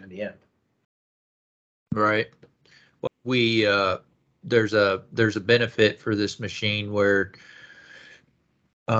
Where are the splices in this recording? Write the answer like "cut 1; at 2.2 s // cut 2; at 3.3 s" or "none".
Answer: cut 1; at 3.1 s